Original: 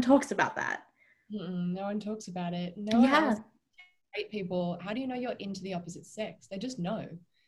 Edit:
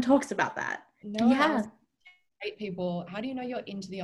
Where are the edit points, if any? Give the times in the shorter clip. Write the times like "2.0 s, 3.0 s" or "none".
1.0 s